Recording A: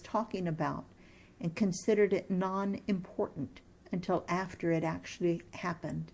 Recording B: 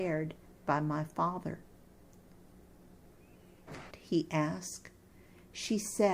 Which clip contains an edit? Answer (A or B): B